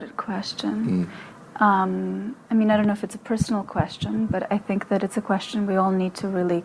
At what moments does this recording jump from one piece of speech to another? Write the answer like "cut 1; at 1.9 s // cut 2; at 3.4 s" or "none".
none